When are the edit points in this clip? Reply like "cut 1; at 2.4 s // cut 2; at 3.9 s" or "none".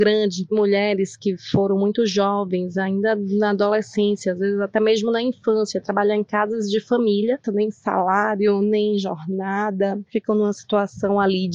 cut 1; at 7.4 s // cut 2; at 10.0 s